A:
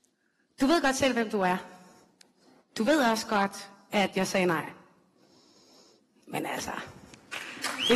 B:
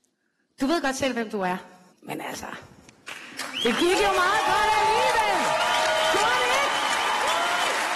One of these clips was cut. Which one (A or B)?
B